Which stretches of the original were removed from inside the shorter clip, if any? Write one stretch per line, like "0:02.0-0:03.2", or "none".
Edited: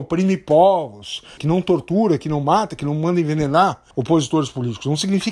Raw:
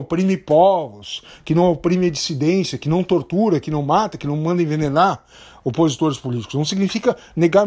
0:01.4-0:02.8
0:05.3-0:05.6